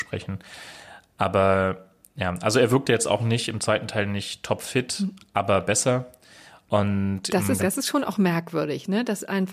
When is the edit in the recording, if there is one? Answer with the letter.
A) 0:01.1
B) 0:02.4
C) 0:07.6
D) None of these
C